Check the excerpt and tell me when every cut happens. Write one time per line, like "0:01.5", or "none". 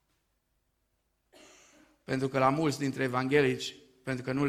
none